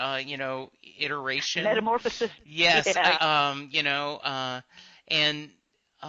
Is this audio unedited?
no; 1 cut; at 3.2 s

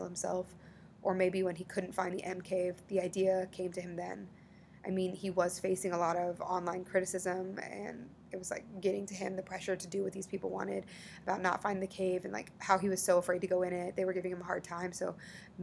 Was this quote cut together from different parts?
no; 0 cuts

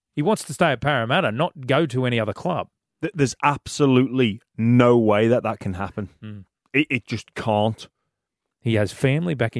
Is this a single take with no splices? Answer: no; 1 cut; at 8.5 s

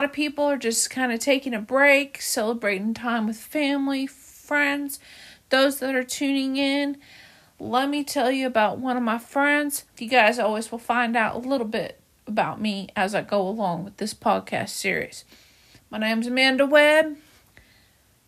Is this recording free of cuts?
no; 2 cuts; at 9.9 s, 15.8 s

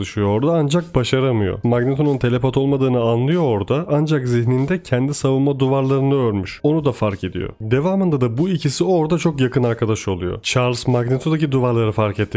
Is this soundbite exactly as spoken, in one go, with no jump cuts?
yes; 0 cuts

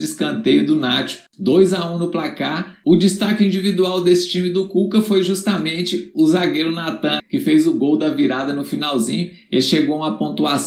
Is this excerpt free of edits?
no; 3 cuts; at 1.3 s, 2.8 s, 7.2 s

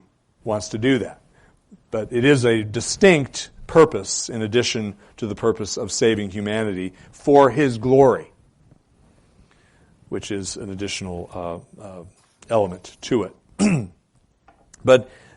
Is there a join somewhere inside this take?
no; 0 cuts

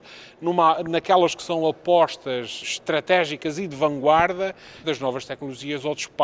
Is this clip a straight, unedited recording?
no; 2 cuts; at 2.6 s, 4.8 s

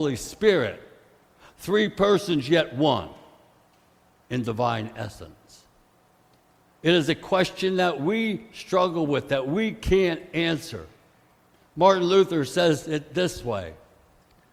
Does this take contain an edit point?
no; 0 cuts

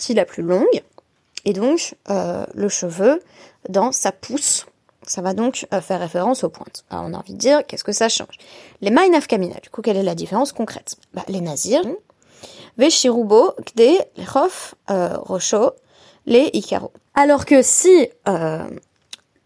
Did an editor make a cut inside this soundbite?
yes; 2 cuts; at 11.8 s, 17.1 s

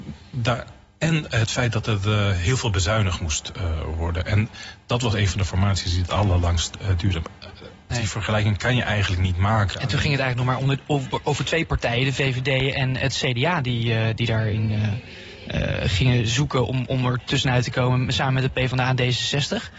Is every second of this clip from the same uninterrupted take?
no; 1 cut; at 7.9 s

